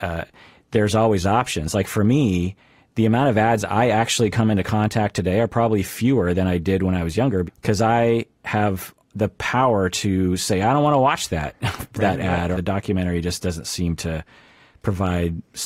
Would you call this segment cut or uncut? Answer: cut